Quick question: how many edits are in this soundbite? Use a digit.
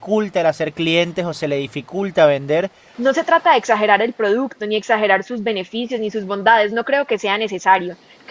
1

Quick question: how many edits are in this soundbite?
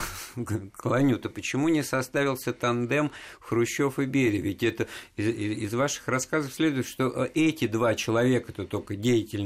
0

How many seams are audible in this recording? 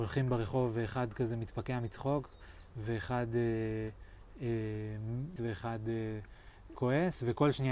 2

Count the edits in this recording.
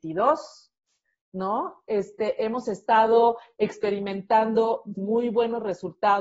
1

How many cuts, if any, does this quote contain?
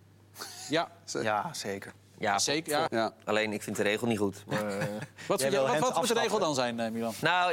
1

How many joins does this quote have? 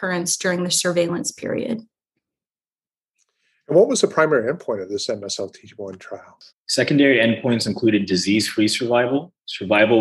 1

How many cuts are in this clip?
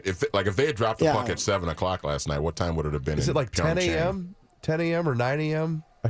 0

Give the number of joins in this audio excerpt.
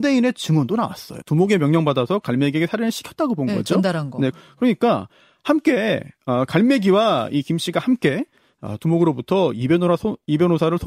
2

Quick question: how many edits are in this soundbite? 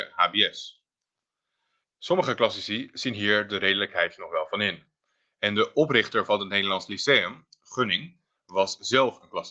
1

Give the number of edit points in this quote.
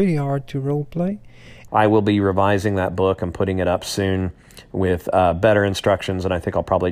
1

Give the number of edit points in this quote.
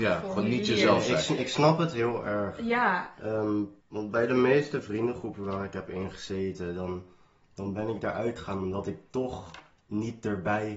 1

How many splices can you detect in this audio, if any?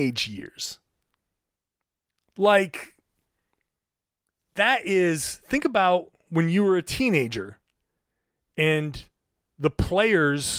0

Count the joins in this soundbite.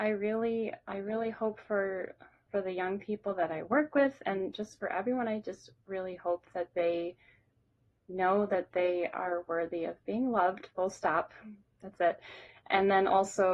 1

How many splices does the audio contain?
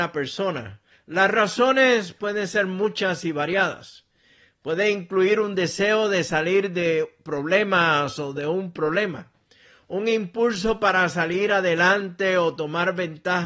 1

